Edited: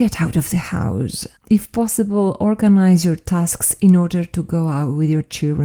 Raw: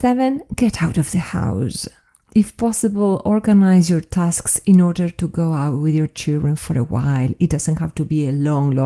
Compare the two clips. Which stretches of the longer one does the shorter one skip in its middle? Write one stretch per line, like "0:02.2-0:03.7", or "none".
0:02.0-0:02.2